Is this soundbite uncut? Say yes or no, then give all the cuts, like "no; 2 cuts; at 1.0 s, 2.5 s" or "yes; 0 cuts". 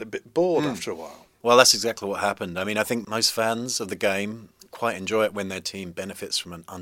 yes; 0 cuts